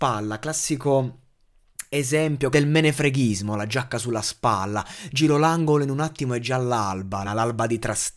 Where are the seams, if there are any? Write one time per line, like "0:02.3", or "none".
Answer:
0:02.5
0:07.2